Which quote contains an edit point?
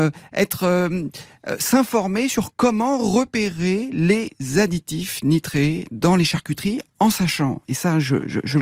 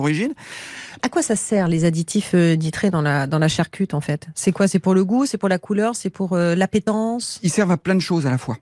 second; 1 cut; at 1.0 s

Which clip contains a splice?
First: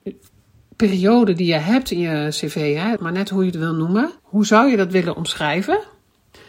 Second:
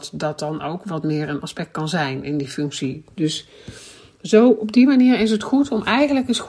first; 2 cuts; at 3.0 s, 4.2 s

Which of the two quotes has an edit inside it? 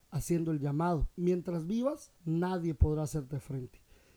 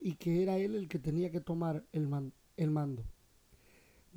first; 2 cuts; at 1.1 s, 2.2 s

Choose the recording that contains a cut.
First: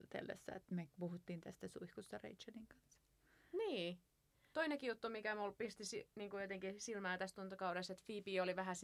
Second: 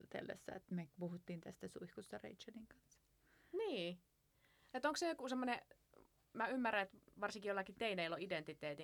first; 1 cut; at 4.5 s

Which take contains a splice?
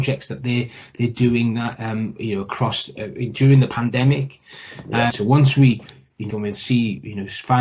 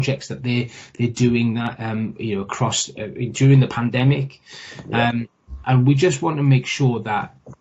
first; 2 cuts; at 5.1 s, 6.3 s

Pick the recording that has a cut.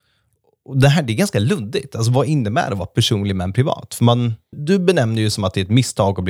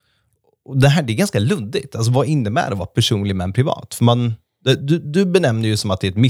first; 1 cut; at 4.5 s

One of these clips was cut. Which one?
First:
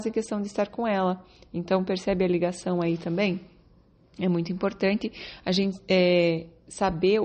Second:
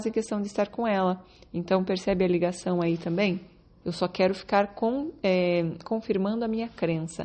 second; 1 cut; at 3.8 s

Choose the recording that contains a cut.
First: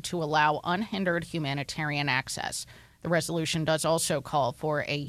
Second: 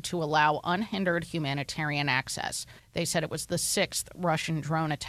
second; 1 cut; at 2.8 s

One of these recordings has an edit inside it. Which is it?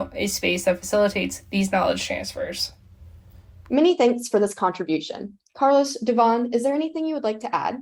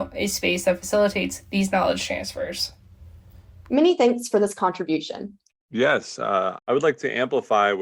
second; 2 cuts; at 5.5 s, 6.6 s

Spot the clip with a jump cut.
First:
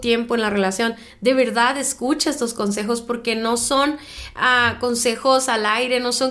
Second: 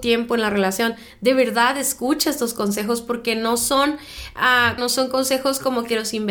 second; 1 cut; at 4.8 s

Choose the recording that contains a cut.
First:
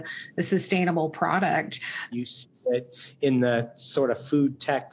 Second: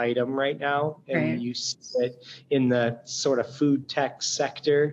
first; 1 cut; at 2.1 s

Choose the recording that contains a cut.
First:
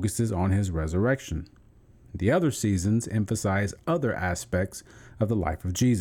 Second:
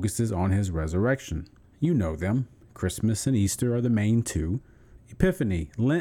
second; 2 cuts; at 1.6 s, 5.0 s

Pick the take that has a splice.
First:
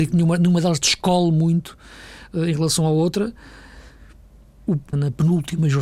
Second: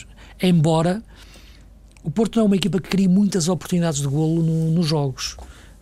first; 1 cut; at 4.9 s

